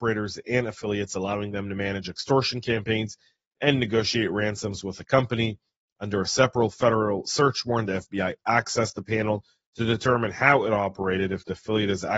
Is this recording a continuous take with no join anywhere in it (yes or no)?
yes